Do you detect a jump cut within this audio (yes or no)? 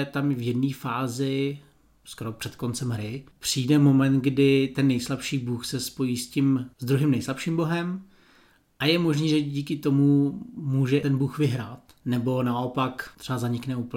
no